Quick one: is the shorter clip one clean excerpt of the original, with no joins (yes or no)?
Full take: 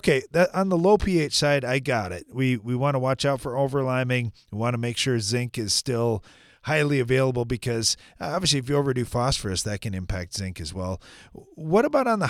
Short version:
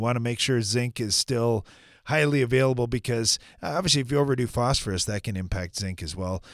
yes